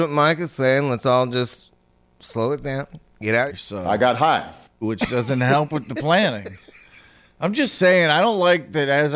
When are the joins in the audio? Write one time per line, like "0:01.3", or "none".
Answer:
0:03.5
0:04.8